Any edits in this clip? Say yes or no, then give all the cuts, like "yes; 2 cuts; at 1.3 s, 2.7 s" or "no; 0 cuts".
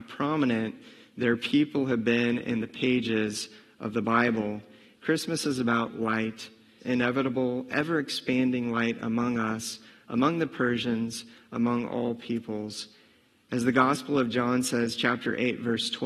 yes; 2 cuts; at 5.0 s, 6.8 s